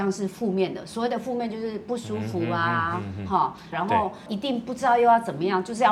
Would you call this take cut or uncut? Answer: cut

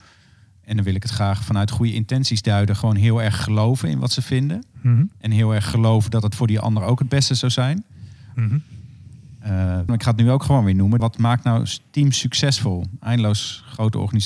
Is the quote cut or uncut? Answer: cut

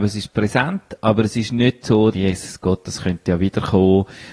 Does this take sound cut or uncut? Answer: cut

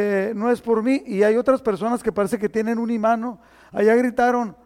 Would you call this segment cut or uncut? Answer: uncut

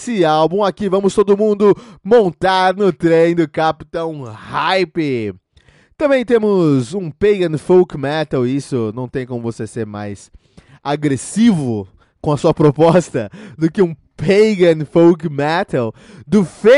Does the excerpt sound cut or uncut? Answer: uncut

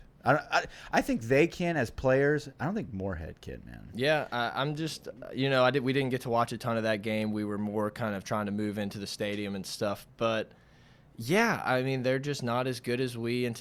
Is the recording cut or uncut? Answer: uncut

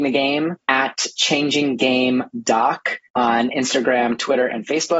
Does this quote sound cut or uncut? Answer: cut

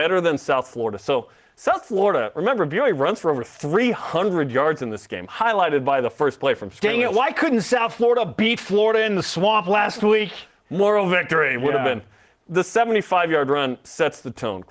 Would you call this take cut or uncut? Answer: uncut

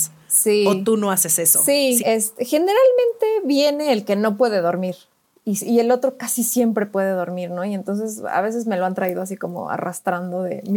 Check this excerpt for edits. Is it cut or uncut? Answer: cut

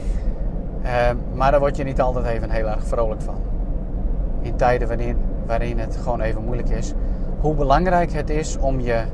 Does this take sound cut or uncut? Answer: cut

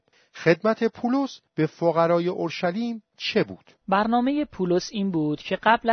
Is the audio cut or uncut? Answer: cut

